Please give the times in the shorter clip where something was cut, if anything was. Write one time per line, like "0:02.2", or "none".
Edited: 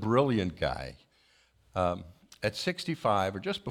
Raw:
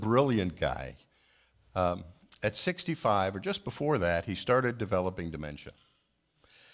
none